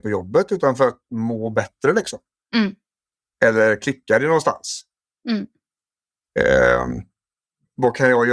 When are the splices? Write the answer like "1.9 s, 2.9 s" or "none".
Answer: 3.3 s